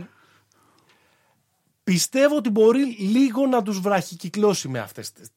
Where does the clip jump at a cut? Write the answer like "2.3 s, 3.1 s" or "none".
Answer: none